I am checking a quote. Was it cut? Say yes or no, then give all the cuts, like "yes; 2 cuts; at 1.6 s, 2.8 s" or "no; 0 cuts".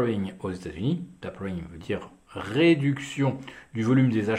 no; 0 cuts